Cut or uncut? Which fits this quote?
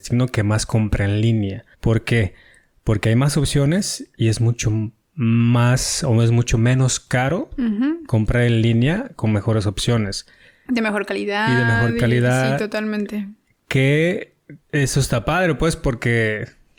cut